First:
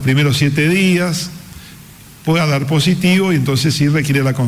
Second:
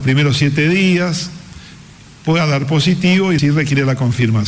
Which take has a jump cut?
second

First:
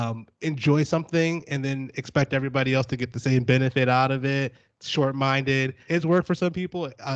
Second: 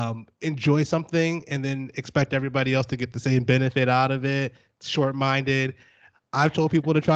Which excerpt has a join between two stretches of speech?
first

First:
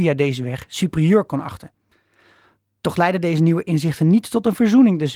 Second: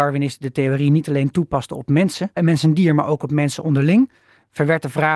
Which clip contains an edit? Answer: second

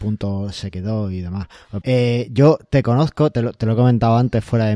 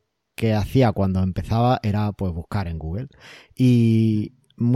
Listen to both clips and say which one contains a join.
first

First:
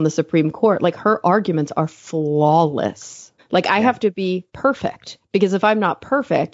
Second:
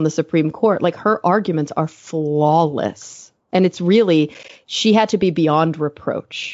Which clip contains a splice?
first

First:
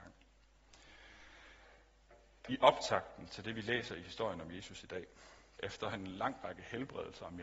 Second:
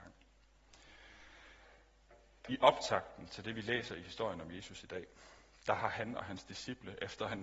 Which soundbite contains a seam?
first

